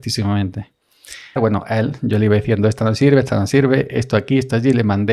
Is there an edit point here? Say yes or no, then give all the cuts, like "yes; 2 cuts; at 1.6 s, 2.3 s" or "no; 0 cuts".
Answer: yes; 1 cut; at 1.4 s